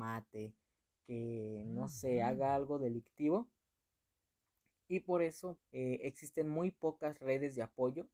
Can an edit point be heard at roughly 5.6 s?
yes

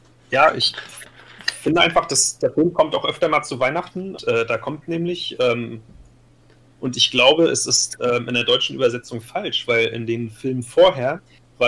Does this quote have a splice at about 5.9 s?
no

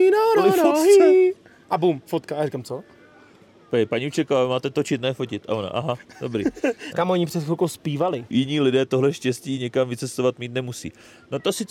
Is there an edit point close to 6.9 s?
yes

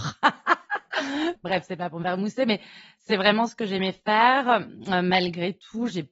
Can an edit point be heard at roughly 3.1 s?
no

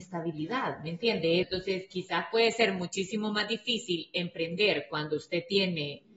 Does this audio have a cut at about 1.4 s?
yes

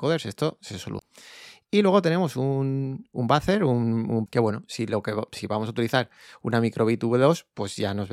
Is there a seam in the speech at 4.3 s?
yes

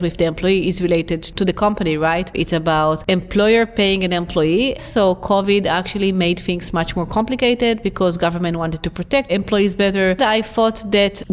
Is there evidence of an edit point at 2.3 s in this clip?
yes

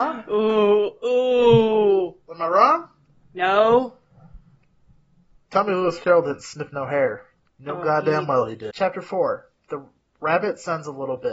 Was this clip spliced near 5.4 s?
no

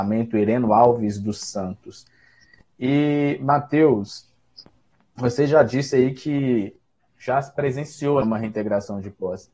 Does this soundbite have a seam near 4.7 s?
no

